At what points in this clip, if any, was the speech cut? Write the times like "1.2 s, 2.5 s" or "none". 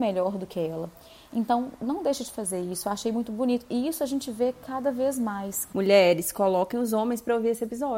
none

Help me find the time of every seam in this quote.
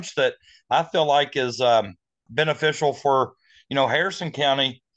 2.3 s

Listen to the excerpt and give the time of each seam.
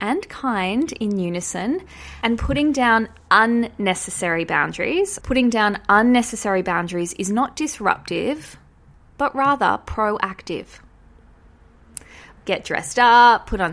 5.2 s, 12.4 s

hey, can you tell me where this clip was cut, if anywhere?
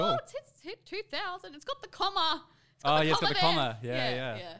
none

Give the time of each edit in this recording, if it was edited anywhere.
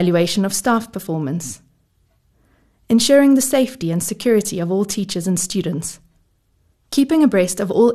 6.9 s

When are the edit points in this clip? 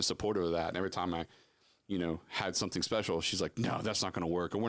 none

